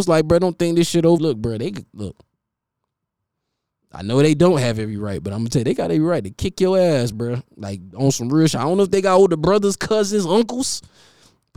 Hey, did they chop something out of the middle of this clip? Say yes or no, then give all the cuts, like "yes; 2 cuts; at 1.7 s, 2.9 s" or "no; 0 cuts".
yes; 1 cut; at 1.2 s